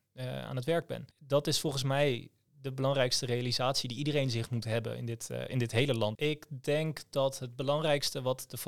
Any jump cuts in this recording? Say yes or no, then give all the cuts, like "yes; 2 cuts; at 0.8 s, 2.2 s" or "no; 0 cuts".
yes; 2 cuts; at 1.1 s, 6.2 s